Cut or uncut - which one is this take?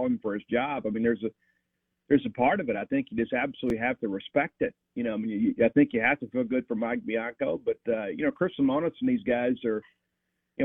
uncut